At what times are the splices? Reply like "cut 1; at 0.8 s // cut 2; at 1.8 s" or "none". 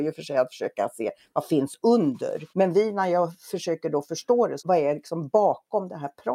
cut 1; at 2.5 s // cut 2; at 4.6 s